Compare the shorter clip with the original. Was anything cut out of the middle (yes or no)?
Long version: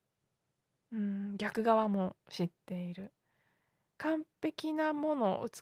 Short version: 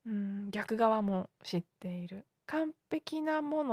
yes